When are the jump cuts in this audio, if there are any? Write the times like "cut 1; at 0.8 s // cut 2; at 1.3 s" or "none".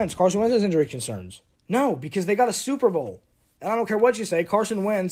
cut 1; at 1.5 s